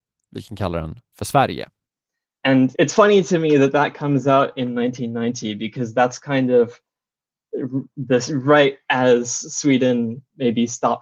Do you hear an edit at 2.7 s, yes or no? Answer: yes